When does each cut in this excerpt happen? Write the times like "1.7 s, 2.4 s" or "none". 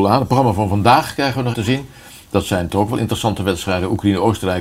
1.5 s